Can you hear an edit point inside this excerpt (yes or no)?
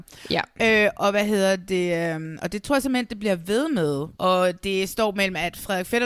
yes